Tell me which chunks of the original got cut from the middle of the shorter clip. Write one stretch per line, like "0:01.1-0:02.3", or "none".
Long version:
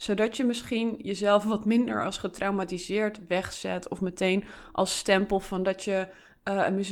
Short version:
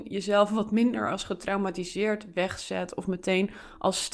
none